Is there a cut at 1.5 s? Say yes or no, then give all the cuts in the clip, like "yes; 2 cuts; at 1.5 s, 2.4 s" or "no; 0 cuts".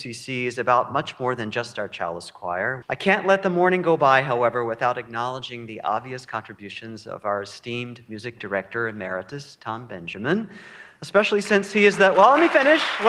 no; 1 cut; at 2.8 s